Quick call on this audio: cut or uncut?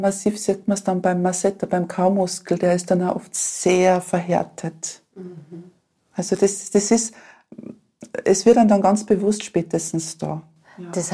uncut